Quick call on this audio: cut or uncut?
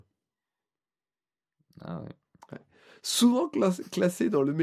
uncut